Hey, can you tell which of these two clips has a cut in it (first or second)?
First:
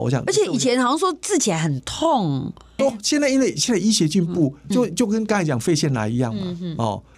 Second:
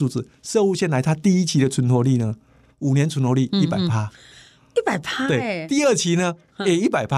first